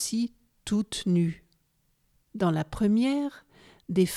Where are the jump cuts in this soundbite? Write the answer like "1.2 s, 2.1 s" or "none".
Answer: 2.3 s